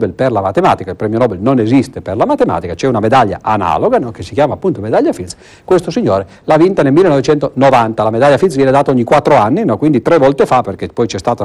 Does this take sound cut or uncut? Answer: uncut